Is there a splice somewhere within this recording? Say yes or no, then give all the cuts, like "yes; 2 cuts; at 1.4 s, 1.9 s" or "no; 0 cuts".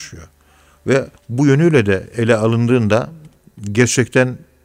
yes; 1 cut; at 1.2 s